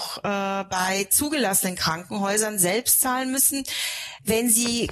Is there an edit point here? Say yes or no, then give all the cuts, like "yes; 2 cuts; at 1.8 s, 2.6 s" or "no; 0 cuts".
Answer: no; 0 cuts